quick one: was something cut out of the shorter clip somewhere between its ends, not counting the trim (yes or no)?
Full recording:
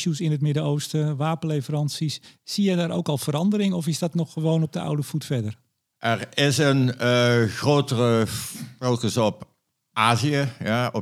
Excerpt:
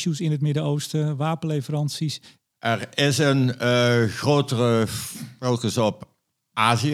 yes